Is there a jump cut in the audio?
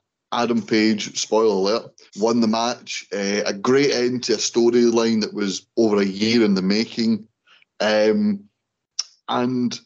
yes; 1 cut; at 2.1 s

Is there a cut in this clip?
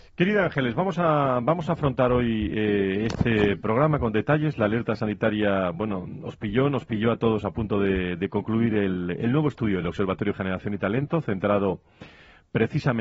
no; 0 cuts

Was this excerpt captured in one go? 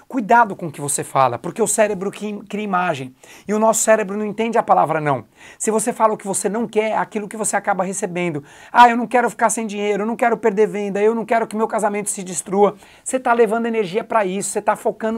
yes; 0 cuts

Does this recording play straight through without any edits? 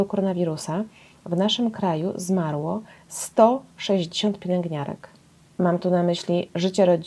no; 1 cut; at 5.4 s

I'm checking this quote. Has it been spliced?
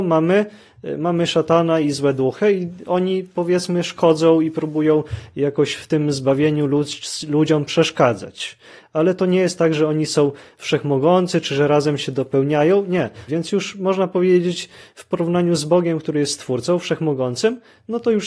yes; 1 cut; at 13.3 s

